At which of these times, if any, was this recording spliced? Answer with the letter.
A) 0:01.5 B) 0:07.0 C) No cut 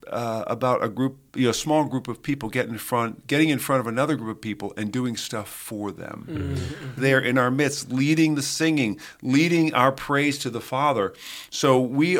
B